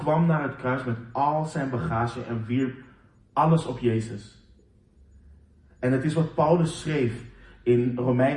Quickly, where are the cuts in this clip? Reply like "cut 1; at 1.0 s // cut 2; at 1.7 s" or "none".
none